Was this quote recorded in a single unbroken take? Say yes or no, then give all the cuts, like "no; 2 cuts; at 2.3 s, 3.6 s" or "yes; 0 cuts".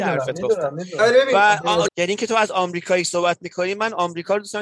no; 1 cut; at 1.9 s